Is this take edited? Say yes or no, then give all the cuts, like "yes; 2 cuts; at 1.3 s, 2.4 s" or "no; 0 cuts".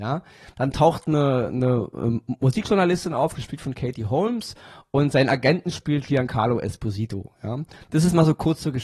no; 0 cuts